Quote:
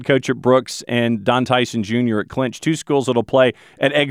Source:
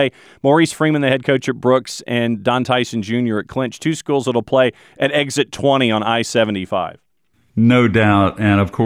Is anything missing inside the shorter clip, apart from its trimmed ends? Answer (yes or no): no